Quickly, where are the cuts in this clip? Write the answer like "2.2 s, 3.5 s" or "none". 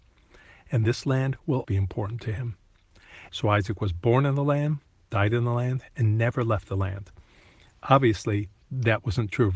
1.6 s, 3.3 s